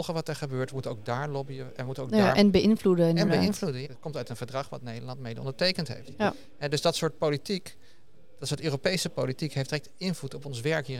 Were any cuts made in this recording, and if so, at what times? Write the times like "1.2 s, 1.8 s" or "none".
3.8 s